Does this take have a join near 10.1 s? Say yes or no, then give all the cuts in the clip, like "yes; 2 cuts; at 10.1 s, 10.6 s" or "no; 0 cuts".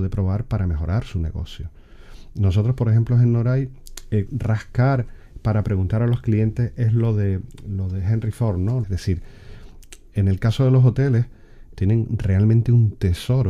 no; 3 cuts; at 4.3 s, 8.8 s, 11.7 s